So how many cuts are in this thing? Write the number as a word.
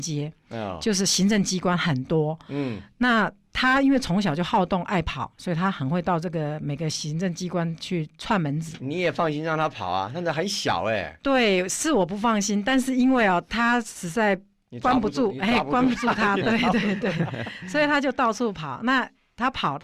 zero